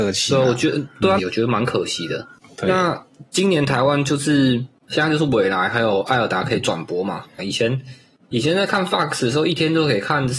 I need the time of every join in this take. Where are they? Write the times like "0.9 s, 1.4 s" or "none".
1.2 s, 7.4 s